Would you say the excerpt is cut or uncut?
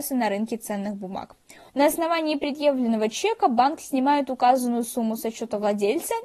cut